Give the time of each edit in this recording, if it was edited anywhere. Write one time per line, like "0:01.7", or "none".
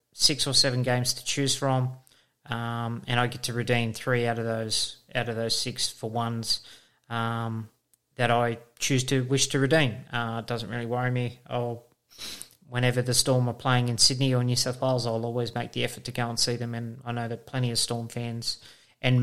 0:10.0